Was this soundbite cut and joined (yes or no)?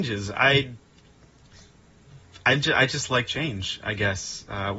no